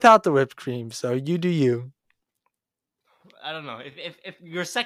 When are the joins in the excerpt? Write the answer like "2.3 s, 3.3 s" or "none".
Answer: none